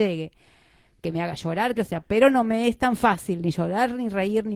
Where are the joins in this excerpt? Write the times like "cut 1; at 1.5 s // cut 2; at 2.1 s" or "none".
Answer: cut 1; at 1.8 s